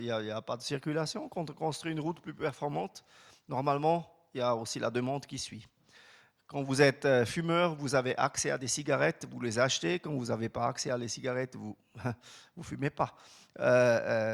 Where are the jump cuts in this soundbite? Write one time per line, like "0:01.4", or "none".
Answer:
none